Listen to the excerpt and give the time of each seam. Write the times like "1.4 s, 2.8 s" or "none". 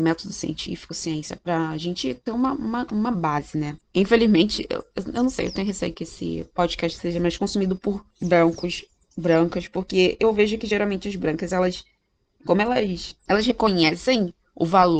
8.1 s